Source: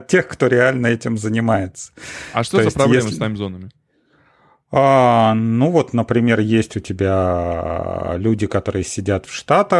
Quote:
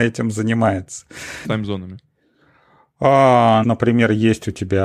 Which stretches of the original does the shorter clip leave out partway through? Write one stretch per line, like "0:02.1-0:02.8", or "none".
0:02.3-0:03.2
0:05.3-0:05.9

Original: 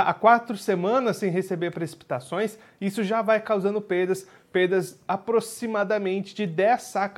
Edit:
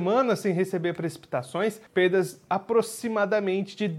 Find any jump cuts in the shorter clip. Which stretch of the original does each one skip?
0:02.6-0:04.4

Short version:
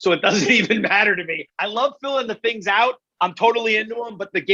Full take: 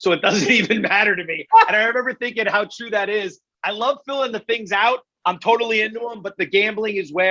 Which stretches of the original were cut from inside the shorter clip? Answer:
0:01.5-0:03.5

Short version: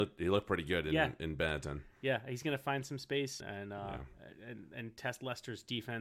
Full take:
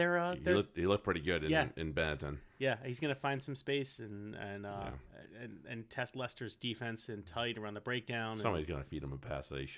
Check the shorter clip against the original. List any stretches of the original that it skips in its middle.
0:04.0-0:04.3

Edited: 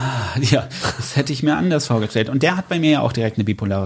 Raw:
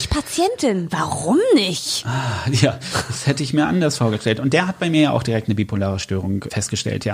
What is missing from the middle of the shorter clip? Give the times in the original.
none

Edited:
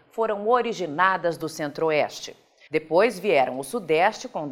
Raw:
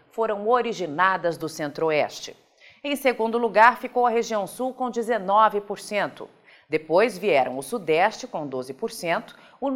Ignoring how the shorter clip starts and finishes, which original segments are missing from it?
0:02.7-0:06.6

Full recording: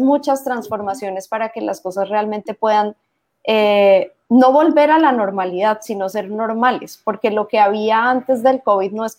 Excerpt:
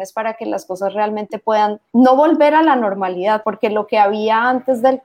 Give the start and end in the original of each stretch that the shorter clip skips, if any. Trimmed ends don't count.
0:03.1-0:04.3
0:05.8-0:07.0

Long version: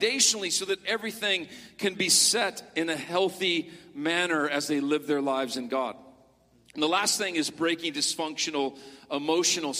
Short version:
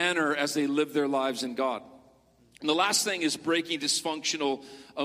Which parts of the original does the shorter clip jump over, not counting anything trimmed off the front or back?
none

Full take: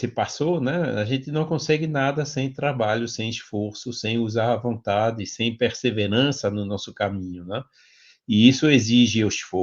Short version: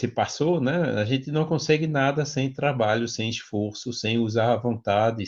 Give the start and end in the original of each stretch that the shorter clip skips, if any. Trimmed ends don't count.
none

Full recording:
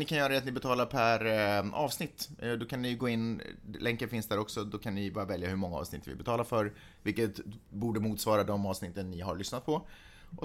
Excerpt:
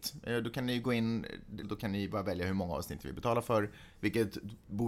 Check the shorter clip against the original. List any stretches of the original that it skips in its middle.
0:03.8-0:04.6

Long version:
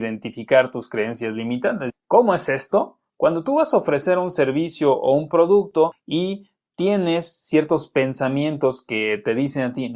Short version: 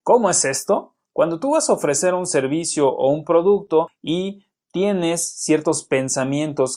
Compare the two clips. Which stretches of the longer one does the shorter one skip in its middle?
none

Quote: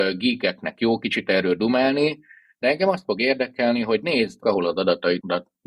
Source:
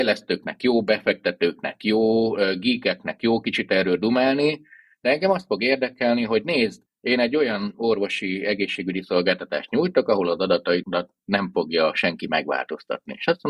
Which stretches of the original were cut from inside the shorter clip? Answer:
0:06.8-0:10.1

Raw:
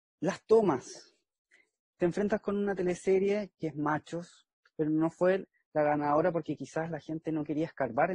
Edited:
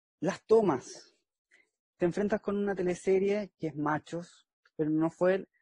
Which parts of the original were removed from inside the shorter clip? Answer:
none

